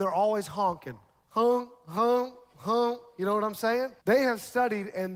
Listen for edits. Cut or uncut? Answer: cut